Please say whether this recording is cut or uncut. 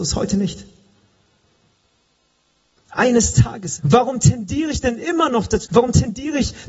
cut